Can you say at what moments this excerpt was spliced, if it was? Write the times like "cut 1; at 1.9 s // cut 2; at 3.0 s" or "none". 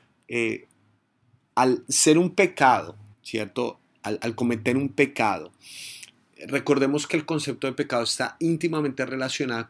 cut 1; at 3.1 s